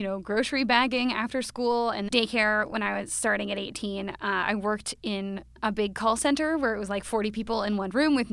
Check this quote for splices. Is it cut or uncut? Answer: uncut